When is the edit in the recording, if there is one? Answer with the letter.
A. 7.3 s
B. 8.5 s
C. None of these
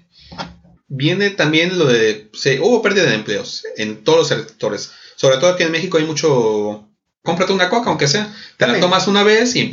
A